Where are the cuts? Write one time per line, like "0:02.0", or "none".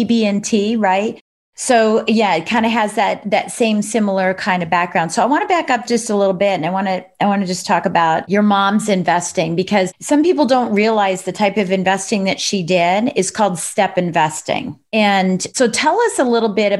none